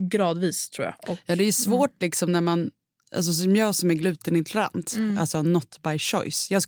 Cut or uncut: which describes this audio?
uncut